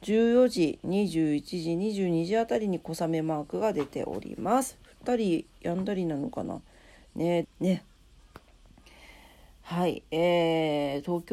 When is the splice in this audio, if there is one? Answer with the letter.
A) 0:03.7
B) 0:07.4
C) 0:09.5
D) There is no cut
B